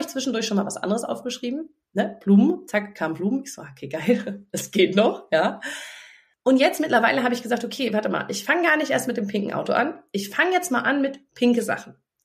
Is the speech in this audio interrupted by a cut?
no; 0 cuts

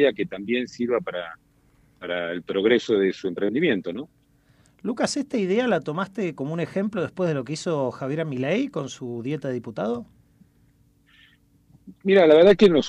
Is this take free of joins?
yes; 0 cuts

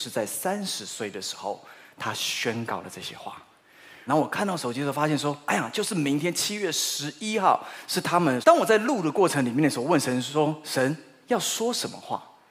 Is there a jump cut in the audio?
yes; 2 cuts; at 4.1 s, 8.4 s

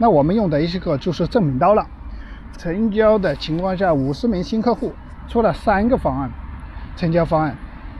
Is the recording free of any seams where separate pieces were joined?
no; 1 cut; at 2.5 s

